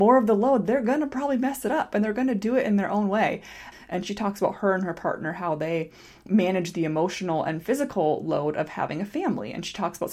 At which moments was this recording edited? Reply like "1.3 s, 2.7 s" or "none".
3.7 s